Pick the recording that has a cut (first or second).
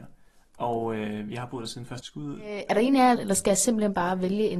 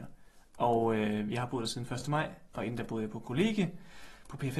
first